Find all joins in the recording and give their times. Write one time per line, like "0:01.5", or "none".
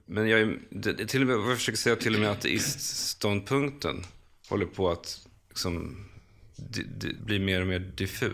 0:07.2